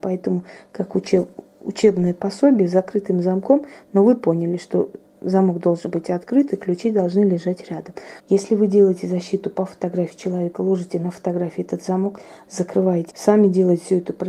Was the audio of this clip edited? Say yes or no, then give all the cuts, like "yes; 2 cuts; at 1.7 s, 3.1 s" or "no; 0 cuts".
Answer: yes; 2 cuts; at 8.2 s, 13.1 s